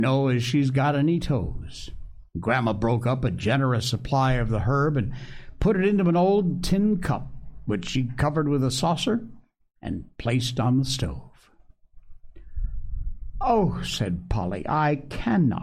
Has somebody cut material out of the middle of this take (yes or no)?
no